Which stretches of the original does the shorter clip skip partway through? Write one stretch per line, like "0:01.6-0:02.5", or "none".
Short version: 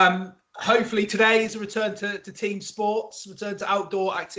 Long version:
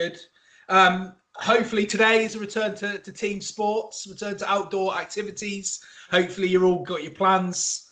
none